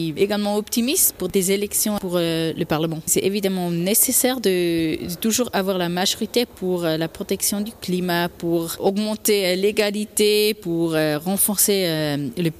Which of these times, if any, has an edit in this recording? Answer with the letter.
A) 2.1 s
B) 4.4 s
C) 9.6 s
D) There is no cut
D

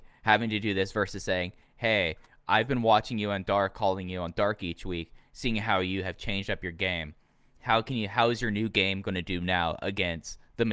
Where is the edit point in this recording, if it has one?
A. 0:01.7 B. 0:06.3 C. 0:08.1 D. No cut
D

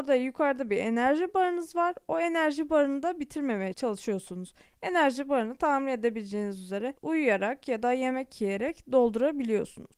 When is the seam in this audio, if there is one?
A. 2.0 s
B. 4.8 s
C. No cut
C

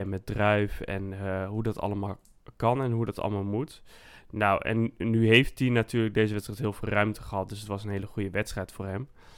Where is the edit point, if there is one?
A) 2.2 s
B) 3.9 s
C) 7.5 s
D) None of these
D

